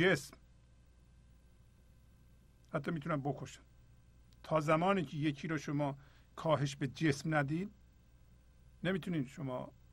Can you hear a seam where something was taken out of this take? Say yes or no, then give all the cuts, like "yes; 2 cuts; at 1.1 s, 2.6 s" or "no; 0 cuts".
no; 0 cuts